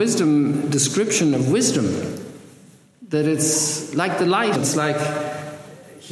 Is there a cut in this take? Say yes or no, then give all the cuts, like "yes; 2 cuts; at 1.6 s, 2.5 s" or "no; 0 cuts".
yes; 1 cut; at 4.6 s